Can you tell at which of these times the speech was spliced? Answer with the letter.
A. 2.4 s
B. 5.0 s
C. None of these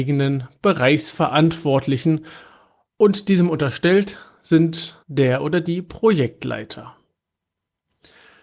B